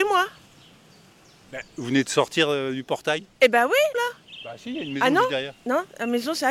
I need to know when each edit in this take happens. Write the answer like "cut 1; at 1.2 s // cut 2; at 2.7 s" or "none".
cut 1; at 3.9 s

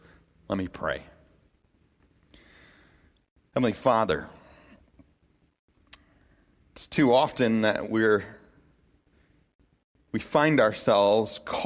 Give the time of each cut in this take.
none

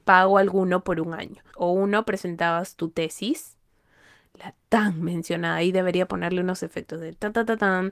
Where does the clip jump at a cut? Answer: cut 1; at 1.5 s

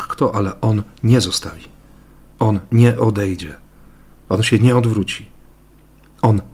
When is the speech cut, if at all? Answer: none

